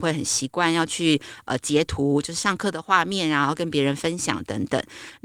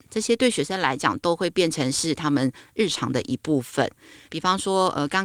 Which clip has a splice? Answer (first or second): second